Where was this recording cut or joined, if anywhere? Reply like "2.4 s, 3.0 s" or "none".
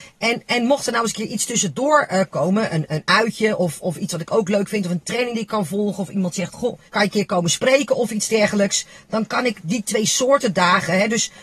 6.9 s